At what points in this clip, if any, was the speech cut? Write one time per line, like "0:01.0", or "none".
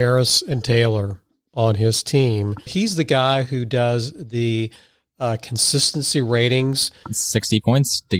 0:02.7
0:07.0